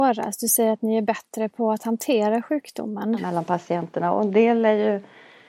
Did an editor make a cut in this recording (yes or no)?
yes